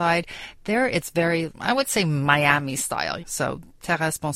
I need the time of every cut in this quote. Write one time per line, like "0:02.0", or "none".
0:01.5
0:03.2